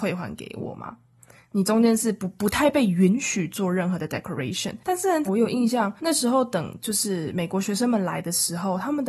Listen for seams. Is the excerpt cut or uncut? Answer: cut